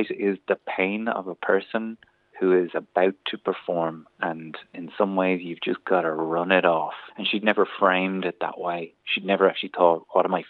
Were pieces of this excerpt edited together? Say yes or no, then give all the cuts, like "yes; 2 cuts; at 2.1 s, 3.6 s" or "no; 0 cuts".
yes; 1 cut; at 7.1 s